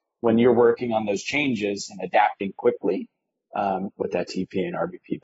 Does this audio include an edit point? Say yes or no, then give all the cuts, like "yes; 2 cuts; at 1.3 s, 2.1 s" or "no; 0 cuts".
yes; 1 cut; at 3.9 s